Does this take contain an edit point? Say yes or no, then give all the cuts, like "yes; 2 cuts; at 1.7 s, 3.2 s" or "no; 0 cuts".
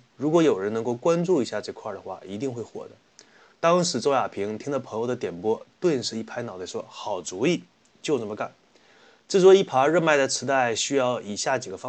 no; 0 cuts